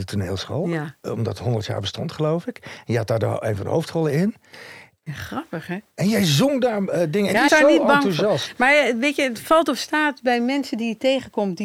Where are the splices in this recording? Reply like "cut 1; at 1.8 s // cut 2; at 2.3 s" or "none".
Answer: cut 1; at 5.0 s // cut 2; at 7.5 s